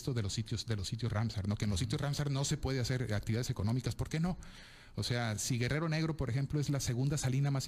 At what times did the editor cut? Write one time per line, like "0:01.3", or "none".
none